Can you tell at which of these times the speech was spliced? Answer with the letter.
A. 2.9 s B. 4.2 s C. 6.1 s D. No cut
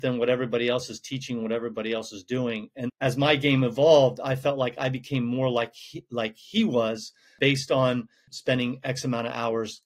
A